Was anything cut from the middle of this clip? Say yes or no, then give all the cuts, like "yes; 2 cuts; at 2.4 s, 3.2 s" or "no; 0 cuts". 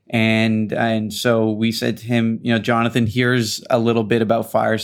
no; 0 cuts